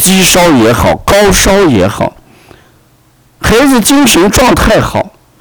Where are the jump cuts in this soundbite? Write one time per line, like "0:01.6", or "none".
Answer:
none